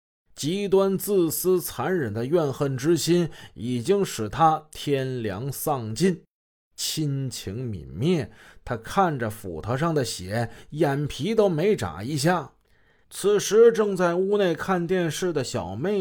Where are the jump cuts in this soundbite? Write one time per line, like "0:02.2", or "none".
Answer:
0:13.0